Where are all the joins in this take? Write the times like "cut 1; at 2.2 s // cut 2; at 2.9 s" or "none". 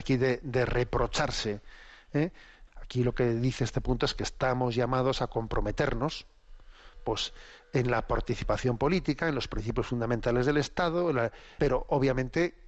cut 1; at 2.7 s // cut 2; at 11.6 s